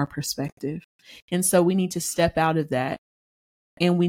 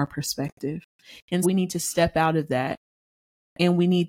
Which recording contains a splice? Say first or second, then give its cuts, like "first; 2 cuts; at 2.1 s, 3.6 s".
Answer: second; 1 cut; at 1.4 s